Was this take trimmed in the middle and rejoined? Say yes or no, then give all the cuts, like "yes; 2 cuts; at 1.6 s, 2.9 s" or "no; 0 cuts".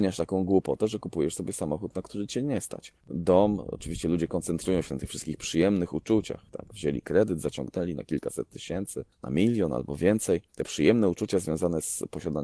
yes; 1 cut; at 3.0 s